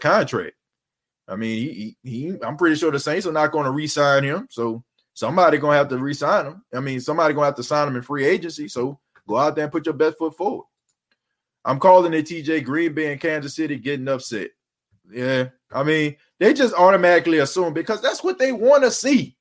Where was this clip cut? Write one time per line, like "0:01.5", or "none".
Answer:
none

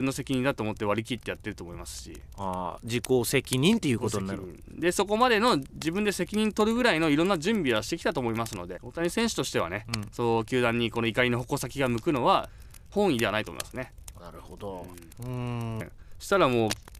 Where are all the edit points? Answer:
0:08.8
0:14.2
0:15.8

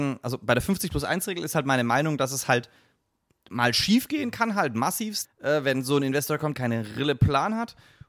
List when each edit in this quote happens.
0:05.2
0:06.5

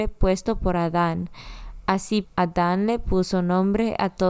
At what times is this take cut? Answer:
0:02.2

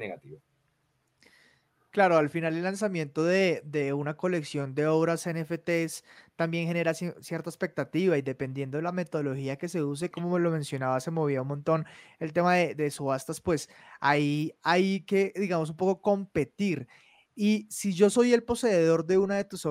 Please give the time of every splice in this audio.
0:10.1

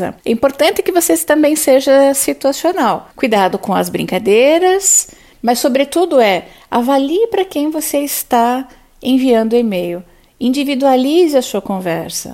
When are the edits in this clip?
0:05.3

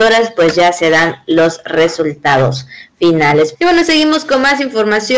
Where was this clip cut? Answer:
0:03.5

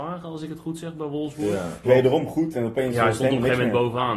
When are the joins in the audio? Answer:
0:01.8

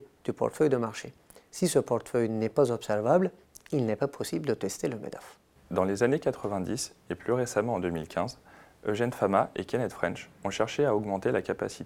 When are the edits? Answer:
none

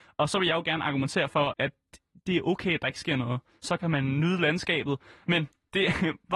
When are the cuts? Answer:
0:01.5
0:05.2

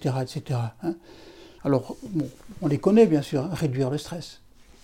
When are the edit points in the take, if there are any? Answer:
0:01.6

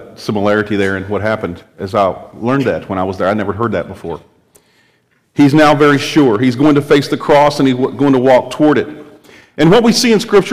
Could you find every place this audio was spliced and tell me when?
0:05.2

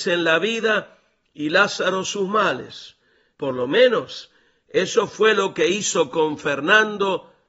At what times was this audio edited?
0:03.3

